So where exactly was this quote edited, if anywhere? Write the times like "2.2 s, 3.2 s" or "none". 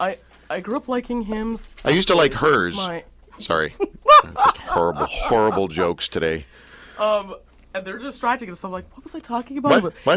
3.4 s